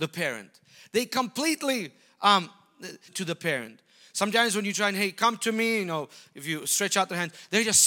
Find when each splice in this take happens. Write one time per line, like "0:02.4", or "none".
0:03.1